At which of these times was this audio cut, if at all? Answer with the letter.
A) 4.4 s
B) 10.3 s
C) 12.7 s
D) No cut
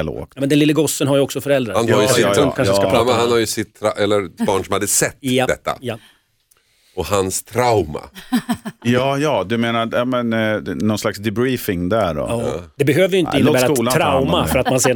A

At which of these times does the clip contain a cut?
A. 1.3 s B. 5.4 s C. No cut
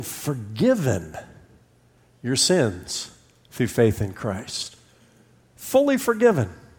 C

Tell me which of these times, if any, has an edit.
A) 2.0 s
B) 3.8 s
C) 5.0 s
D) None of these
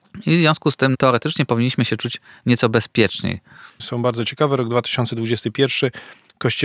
B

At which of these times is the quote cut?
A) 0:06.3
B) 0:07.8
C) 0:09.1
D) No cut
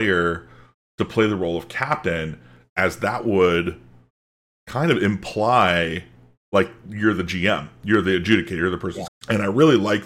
C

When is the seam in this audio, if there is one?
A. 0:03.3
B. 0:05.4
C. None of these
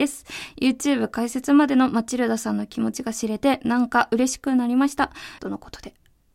B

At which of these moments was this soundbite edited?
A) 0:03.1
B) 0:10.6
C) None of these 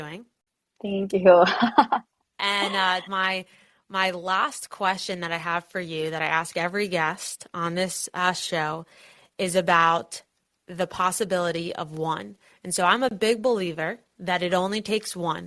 A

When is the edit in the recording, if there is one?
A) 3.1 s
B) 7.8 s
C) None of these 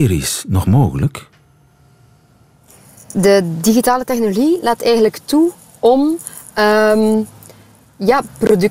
A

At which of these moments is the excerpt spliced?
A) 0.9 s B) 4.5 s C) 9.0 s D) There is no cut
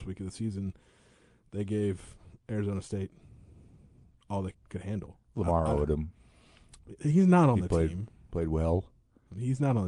B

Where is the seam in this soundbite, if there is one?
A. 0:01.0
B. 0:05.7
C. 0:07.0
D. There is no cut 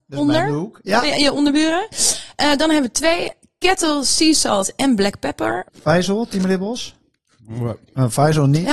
B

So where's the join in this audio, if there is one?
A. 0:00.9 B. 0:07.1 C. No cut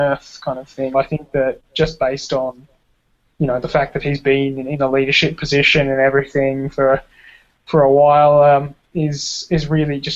A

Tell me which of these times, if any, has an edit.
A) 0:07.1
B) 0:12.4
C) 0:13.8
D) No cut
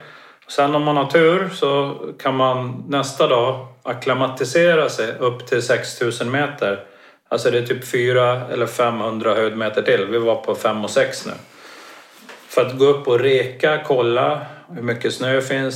D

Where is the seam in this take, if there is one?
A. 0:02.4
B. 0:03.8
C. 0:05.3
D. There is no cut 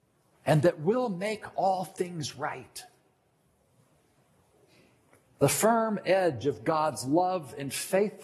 C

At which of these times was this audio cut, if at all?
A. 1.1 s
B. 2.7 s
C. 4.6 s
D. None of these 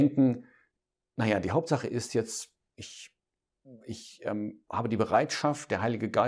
B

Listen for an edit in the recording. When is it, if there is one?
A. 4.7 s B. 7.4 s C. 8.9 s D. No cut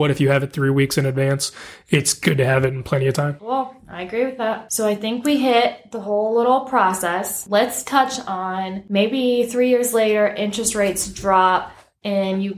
D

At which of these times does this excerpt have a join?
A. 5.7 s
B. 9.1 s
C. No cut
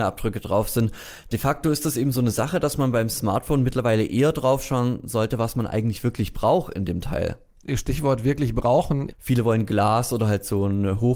B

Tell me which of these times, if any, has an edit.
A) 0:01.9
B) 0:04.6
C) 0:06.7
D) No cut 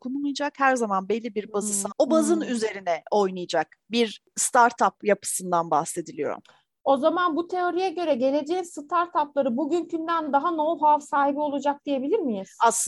A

